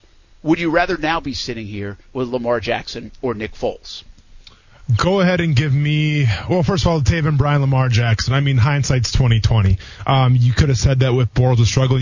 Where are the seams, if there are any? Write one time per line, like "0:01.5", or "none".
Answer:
none